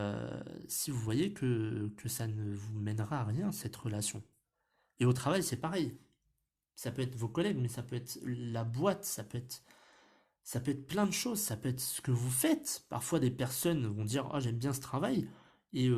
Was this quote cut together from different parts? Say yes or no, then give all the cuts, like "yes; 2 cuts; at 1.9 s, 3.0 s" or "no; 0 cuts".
no; 0 cuts